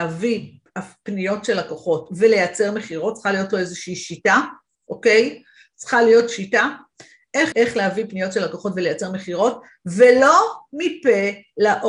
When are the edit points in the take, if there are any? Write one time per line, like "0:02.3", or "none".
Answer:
0:07.5